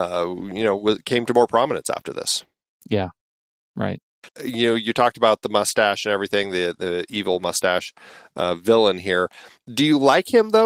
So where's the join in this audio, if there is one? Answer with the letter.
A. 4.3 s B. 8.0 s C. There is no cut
A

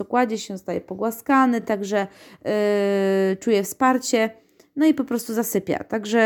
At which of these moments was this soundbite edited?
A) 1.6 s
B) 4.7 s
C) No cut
C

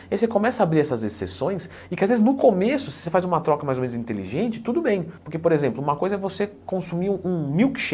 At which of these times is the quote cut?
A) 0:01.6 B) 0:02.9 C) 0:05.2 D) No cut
C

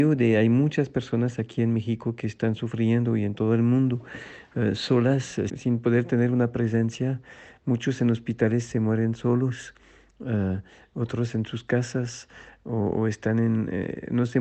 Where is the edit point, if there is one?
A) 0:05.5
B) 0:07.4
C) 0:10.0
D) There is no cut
A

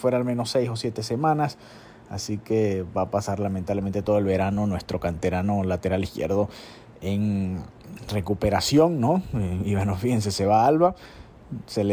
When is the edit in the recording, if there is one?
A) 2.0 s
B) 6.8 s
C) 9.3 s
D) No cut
D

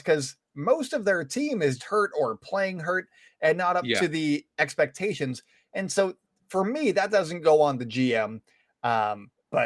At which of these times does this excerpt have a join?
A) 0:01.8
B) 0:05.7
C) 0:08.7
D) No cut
A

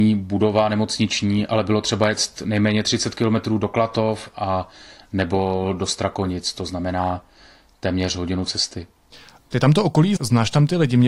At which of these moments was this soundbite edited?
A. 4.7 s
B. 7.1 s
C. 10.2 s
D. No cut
C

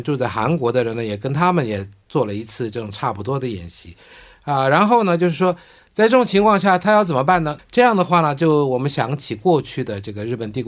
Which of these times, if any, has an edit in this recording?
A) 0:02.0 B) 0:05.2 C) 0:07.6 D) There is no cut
C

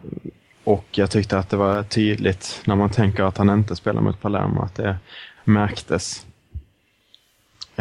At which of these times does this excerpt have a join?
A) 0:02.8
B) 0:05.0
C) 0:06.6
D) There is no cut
D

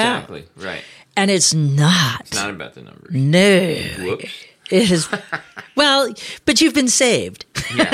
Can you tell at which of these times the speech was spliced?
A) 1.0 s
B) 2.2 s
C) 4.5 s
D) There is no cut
D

